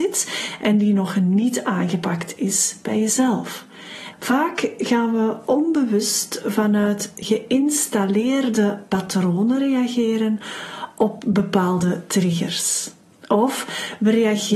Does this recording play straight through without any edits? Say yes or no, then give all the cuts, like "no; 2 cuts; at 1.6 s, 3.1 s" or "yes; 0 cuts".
no; 1 cut; at 4.1 s